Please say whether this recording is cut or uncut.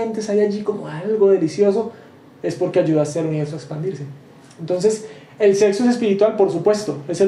uncut